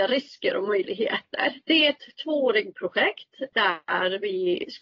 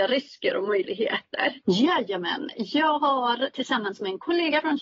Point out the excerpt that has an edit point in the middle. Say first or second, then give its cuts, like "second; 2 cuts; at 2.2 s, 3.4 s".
second; 1 cut; at 1.6 s